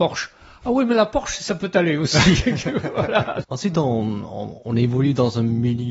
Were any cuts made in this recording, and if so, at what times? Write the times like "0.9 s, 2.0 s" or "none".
3.4 s